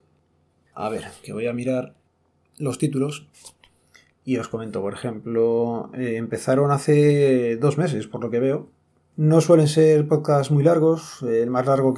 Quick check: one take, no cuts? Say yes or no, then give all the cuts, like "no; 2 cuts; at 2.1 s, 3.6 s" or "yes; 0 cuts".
yes; 0 cuts